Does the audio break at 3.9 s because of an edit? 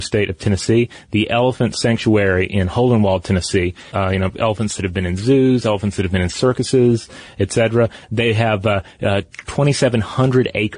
yes; 1 cut; at 3.9 s

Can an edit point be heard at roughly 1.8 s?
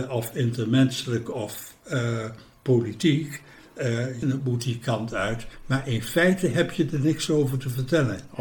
no; 1 cut; at 4.2 s

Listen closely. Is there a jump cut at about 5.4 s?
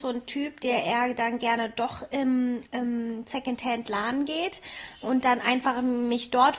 no; 1 cut; at 2.7 s

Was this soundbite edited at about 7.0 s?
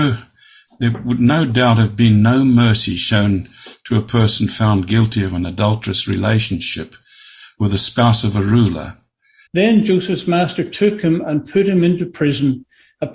no; 1 cut; at 9.5 s

